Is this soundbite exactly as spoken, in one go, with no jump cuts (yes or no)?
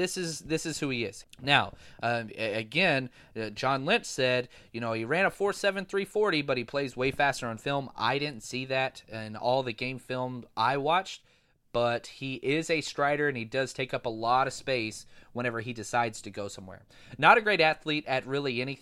no